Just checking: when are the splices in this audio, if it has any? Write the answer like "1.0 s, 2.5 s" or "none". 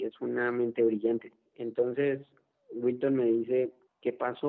none